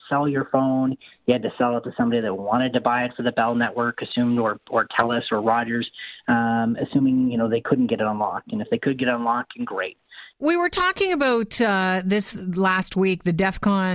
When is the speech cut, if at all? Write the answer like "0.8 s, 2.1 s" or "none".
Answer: 10.3 s